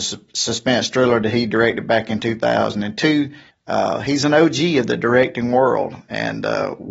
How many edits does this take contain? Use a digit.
1